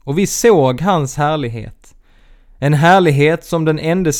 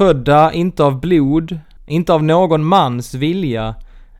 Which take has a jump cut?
second; 1 cut; at 1.8 s

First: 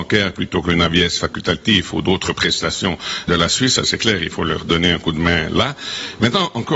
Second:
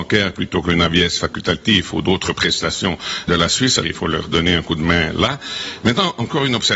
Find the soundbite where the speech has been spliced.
second; 1 cut; at 3.8 s

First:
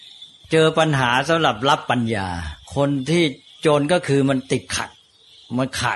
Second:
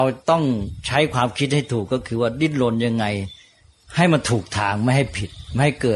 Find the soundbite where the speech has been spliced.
first; 1 cut; at 2.6 s

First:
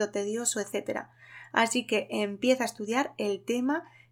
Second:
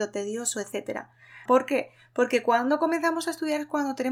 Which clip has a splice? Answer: second; 1 cut; at 1.5 s

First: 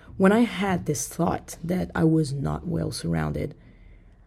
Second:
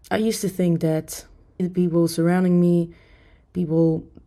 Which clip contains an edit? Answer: second; 1 cut; at 1.6 s

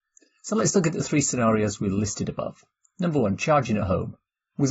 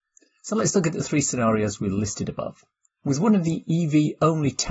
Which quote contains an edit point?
second; 1 cut; at 2.8 s

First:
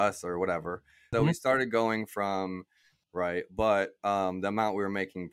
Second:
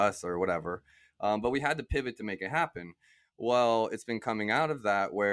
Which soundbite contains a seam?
first; 2 cuts; at 1.1 s, 3.0 s

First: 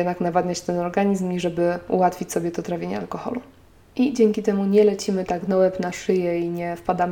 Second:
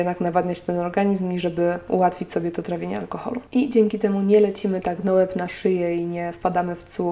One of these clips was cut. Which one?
second; 1 cut; at 3.5 s

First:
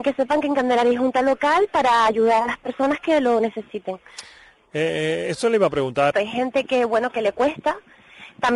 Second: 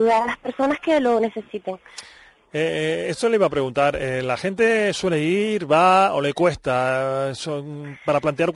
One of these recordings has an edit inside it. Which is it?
first; 1 cut; at 6.1 s

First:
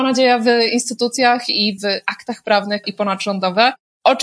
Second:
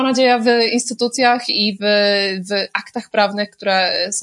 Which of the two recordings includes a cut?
first; 2 cuts; at 1.8 s, 2.8 s

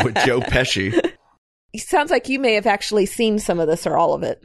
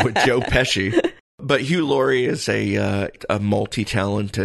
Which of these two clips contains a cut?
first; 1 cut; at 1.2 s

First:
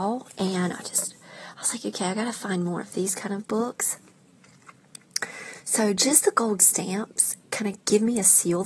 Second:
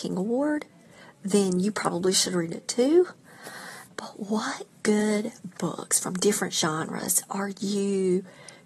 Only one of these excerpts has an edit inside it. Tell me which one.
second; 1 cut; at 3.9 s

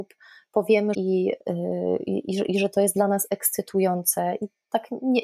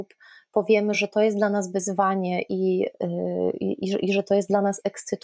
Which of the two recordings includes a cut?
first; 1 cut; at 0.9 s

